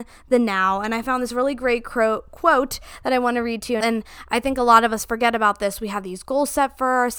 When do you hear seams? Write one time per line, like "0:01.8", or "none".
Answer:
0:03.8